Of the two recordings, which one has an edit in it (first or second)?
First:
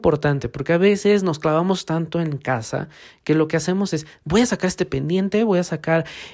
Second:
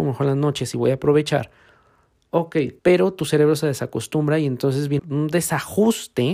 second